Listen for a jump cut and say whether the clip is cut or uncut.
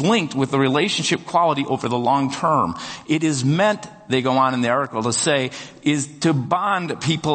uncut